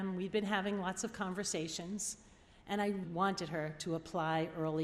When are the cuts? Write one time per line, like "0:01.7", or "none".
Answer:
0:03.0